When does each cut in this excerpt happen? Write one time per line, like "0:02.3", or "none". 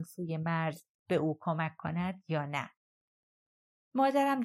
none

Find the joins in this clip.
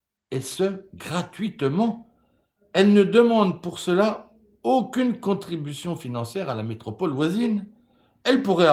none

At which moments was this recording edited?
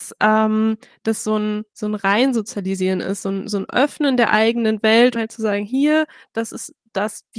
0:05.2

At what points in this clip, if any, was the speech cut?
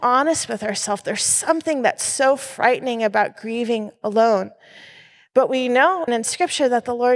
0:06.1

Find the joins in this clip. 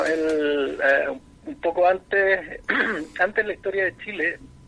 0:03.2

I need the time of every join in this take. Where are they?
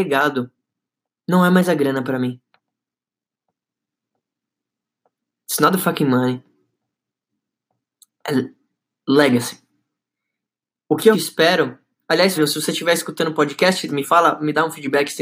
0:11.1
0:12.3
0:13.9

